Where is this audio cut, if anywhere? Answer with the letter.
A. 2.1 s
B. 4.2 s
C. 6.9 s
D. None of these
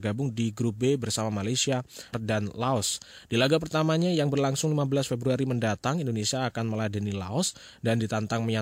A